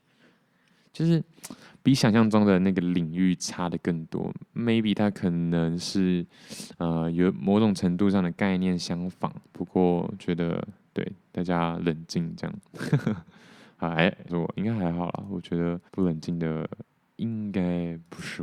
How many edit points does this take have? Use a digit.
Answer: 2